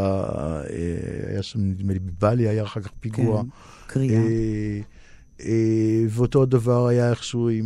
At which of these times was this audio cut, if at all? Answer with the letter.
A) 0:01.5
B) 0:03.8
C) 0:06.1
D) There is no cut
D